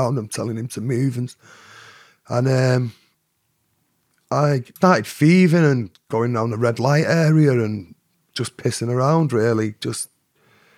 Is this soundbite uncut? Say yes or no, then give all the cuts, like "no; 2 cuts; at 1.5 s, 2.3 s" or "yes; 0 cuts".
no; 1 cut; at 4.8 s